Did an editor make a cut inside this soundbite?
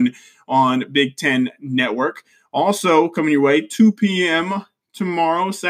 no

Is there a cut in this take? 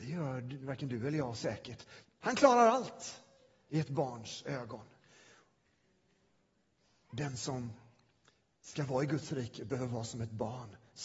yes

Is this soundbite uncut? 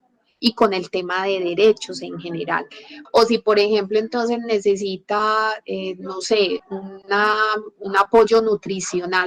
no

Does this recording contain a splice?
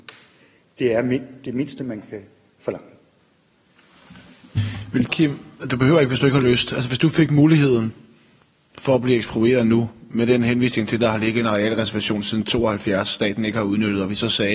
yes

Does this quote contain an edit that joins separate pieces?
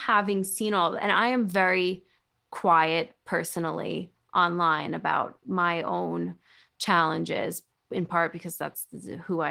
no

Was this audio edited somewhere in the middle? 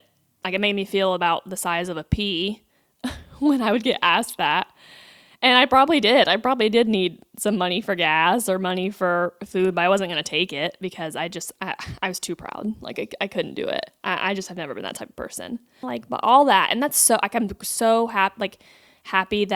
yes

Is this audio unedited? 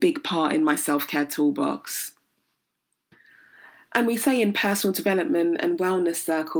yes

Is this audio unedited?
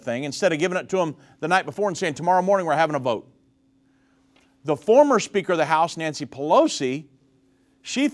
yes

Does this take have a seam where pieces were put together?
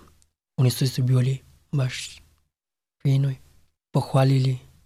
yes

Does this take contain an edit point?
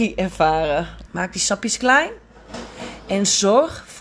yes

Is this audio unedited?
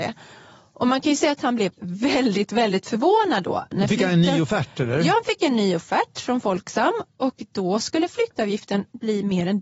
yes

